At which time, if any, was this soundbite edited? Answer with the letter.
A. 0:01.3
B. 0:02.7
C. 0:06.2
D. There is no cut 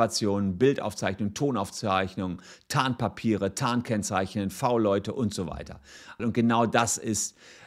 C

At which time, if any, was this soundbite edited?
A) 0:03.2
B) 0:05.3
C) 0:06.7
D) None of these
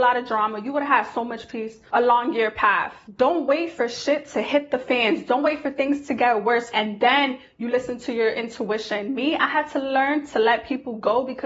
C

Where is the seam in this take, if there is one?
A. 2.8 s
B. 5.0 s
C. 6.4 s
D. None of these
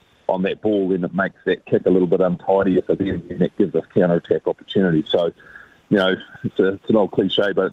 C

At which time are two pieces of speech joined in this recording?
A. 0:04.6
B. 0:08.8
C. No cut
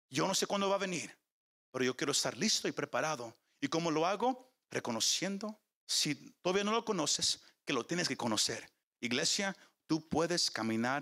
B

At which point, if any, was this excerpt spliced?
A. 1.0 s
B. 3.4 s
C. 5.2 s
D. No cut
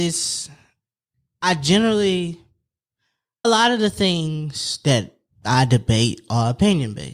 B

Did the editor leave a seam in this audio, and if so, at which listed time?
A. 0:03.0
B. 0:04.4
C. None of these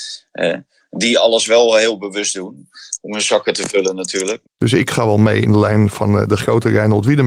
B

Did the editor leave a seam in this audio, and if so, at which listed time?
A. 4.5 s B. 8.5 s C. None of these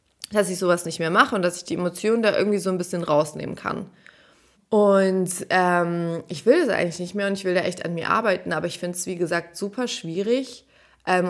A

